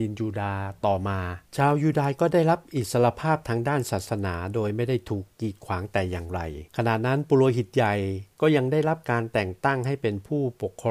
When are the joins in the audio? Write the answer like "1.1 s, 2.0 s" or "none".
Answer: 1.5 s, 6.7 s